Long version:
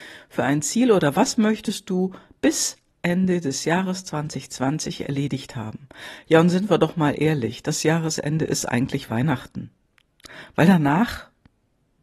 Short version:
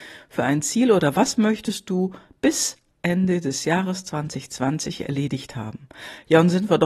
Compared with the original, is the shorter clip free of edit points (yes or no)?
yes